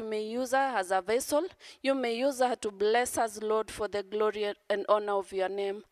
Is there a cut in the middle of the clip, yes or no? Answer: no